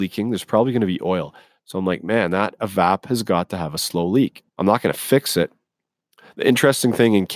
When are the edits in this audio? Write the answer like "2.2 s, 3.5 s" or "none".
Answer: 1.6 s, 4.5 s